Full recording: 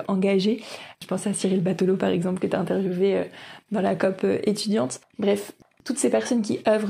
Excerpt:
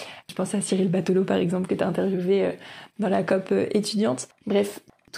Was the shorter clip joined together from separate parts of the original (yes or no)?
no